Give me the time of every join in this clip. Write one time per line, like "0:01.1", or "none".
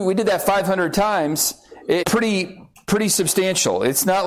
0:02.0